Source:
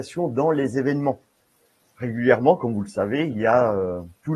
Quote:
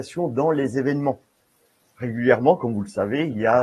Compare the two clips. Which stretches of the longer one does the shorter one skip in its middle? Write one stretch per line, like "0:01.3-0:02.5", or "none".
none